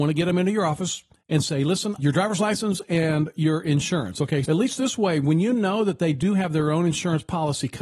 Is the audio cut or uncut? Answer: cut